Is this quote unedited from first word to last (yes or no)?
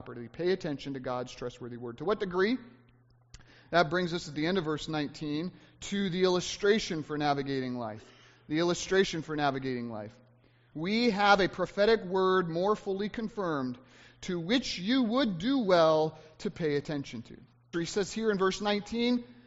no